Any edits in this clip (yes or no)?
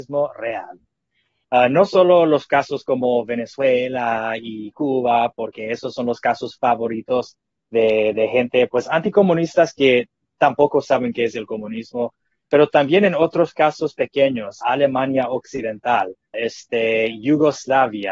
yes